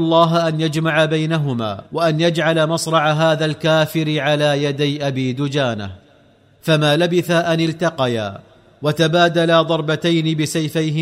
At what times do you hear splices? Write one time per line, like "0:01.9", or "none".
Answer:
0:01.9